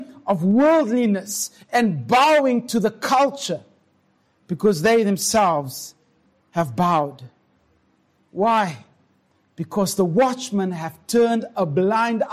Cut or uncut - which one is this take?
cut